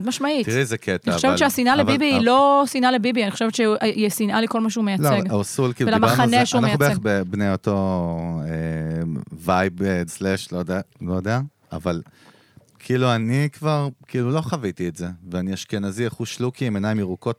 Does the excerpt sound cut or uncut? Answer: cut